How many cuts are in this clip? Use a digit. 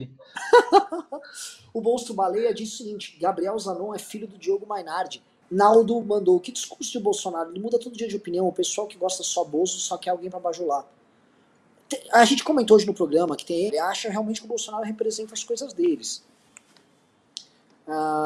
2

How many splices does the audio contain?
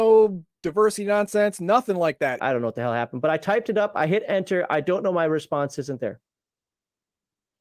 1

